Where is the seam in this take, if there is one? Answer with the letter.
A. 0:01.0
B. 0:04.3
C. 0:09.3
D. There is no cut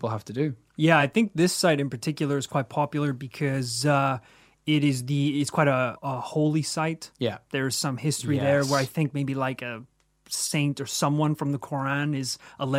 D